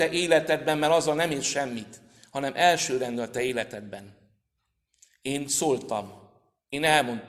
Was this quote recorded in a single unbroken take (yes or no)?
yes